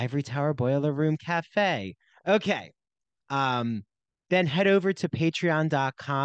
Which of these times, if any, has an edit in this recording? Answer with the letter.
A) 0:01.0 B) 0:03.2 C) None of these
B